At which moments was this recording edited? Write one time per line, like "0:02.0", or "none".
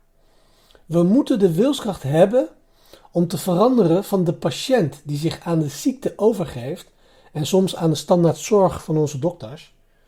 none